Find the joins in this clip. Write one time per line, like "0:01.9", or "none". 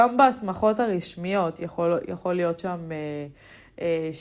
none